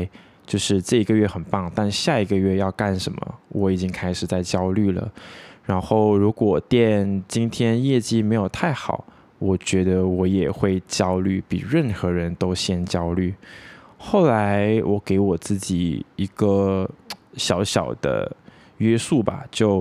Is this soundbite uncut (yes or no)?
yes